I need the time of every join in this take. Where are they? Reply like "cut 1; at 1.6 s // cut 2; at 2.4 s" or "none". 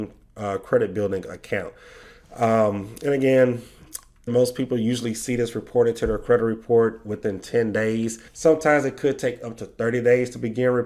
cut 1; at 4.3 s // cut 2; at 8.3 s